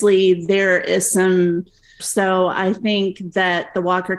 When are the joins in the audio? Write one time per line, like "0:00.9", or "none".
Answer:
0:02.0